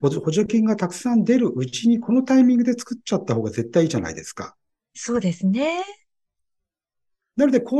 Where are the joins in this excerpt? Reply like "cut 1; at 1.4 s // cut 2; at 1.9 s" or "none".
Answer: none